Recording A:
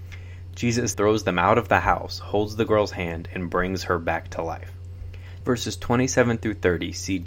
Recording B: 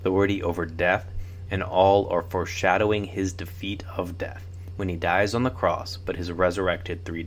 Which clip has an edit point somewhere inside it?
A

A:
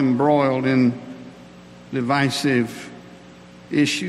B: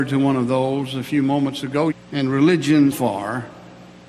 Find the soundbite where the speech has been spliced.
B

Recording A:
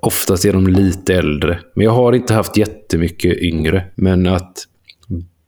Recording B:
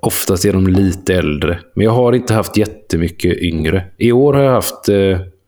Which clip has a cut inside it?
A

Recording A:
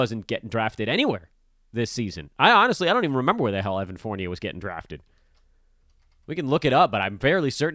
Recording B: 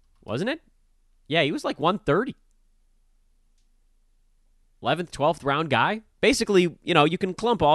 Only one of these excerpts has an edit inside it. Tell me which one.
B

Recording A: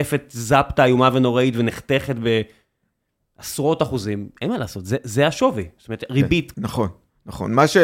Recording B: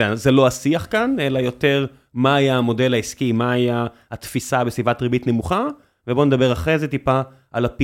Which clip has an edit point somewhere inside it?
A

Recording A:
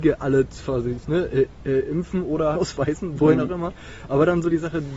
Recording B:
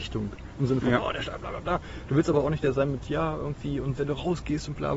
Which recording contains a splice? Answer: A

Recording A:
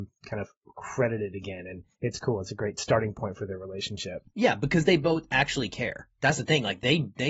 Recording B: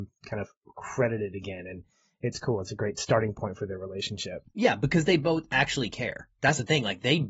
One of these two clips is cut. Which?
A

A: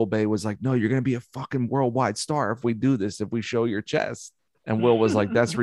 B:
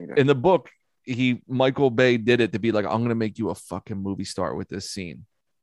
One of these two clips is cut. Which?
A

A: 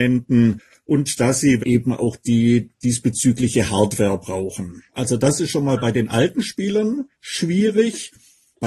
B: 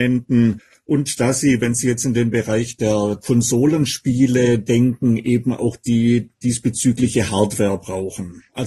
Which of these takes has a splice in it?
A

